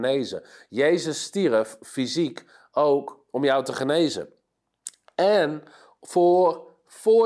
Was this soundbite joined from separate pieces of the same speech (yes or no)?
no